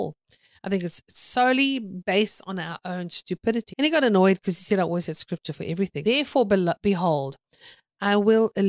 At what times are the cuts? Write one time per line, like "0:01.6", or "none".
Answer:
0:03.7
0:06.0